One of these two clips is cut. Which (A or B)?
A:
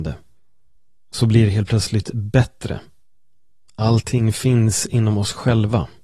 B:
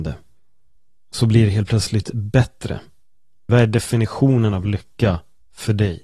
B